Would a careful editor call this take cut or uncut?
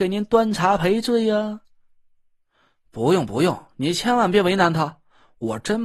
uncut